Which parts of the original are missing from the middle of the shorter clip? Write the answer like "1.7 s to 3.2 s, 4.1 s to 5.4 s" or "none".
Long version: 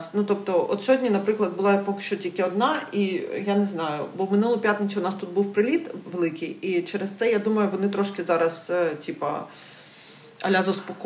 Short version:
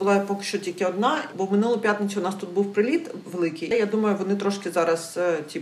2.9 s to 4.1 s, 6.5 s to 7.2 s